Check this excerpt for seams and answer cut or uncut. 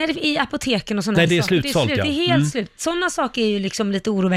uncut